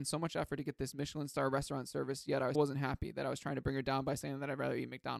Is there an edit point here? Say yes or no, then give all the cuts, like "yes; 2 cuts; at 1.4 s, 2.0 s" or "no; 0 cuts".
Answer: yes; 1 cut; at 2.5 s